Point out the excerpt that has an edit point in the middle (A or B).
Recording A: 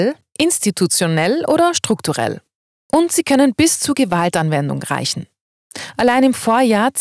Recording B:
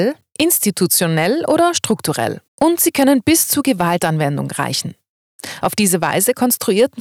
B